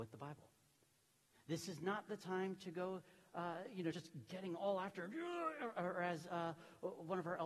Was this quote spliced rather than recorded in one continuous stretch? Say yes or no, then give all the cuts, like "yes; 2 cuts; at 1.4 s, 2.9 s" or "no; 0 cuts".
no; 0 cuts